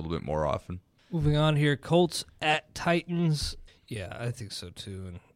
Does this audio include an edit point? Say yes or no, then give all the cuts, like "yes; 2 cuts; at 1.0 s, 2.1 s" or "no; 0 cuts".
yes; 2 cuts; at 1.0 s, 3.7 s